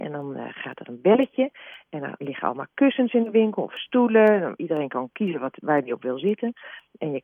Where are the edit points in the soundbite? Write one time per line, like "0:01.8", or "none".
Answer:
none